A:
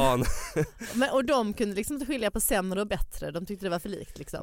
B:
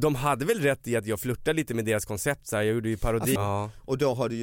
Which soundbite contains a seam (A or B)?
B